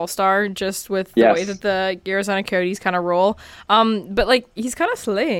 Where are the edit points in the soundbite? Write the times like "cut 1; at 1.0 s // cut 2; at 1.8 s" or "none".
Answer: none